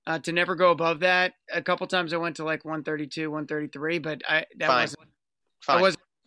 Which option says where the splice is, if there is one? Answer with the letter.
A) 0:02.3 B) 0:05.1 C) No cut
C